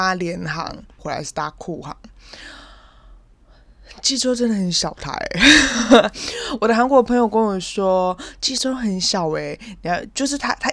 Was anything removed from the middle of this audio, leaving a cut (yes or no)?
yes